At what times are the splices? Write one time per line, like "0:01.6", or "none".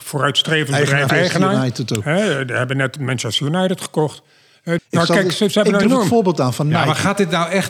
0:01.1
0:04.8
0:05.8

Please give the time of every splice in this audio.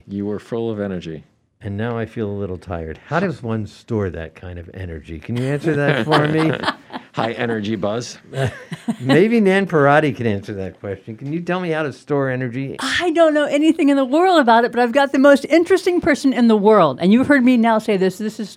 none

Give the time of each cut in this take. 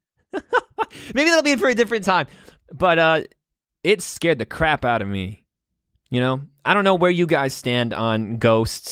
none

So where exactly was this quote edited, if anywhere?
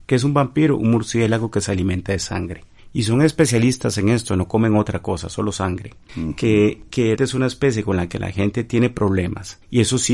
0:06.1
0:07.2

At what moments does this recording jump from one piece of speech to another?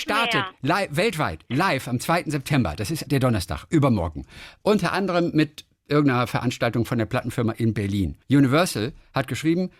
0:03.1
0:08.2

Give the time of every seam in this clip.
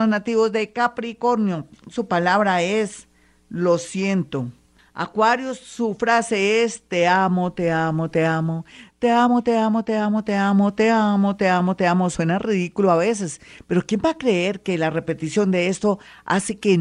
0:04.8

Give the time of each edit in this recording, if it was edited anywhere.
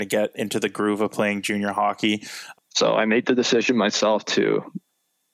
0:02.5

